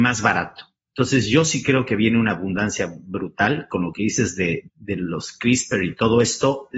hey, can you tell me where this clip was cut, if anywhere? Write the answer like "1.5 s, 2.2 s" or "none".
4.7 s

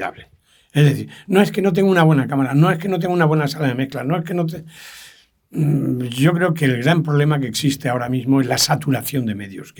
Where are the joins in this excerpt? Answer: none

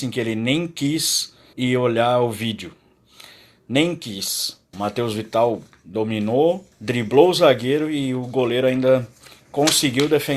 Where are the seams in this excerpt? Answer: 1.5 s, 4.7 s, 6.7 s

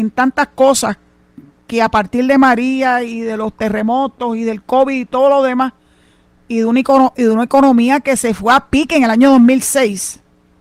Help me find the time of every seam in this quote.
none

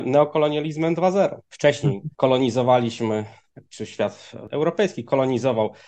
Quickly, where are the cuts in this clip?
1.4 s

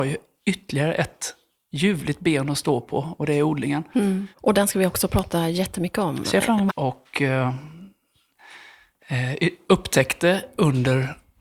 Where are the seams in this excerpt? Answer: 4.3 s, 6.7 s

